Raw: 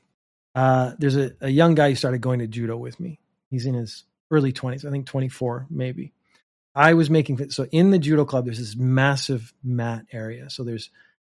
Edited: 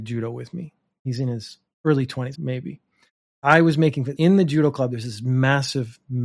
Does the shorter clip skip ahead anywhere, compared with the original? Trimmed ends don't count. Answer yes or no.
yes